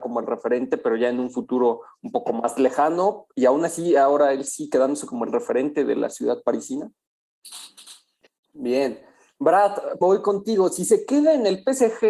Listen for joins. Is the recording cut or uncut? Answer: cut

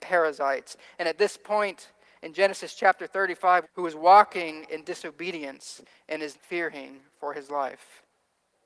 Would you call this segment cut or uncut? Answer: cut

